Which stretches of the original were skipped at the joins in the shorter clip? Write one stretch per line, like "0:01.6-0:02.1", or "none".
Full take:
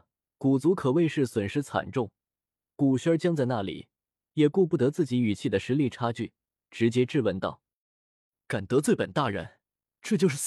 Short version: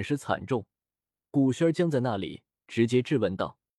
0:04.0-0:06.6